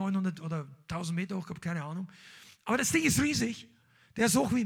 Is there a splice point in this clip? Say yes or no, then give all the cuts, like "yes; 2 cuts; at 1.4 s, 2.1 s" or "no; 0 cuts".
no; 0 cuts